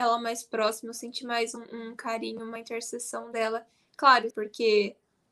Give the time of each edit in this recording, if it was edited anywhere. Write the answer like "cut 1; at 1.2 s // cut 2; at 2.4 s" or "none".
cut 1; at 4.3 s